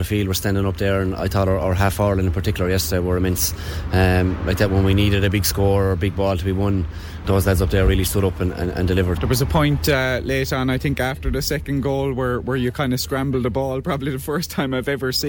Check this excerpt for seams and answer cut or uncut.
cut